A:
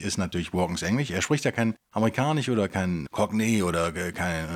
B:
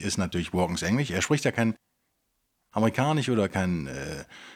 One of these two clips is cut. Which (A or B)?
A